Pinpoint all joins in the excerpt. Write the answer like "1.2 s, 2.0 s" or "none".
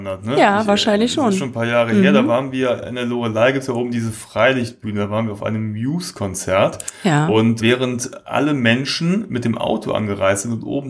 7.6 s